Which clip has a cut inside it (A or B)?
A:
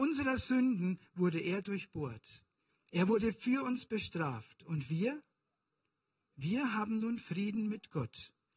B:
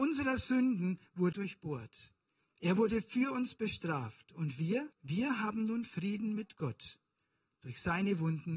B